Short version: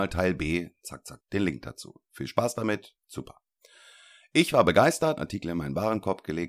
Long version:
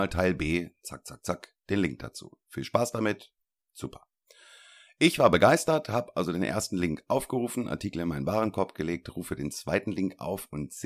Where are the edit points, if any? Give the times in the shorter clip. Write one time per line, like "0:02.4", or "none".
0:01.2
0:03.0
0:05.2